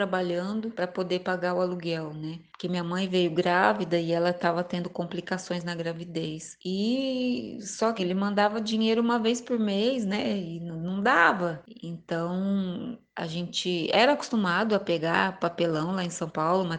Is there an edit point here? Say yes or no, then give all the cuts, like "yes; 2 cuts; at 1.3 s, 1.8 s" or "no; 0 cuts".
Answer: yes; 1 cut; at 8.0 s